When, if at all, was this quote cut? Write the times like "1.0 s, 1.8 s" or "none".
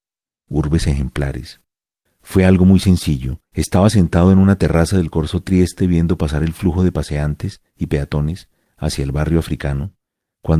2.1 s, 3.5 s